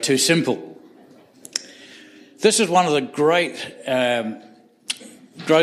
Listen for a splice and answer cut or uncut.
uncut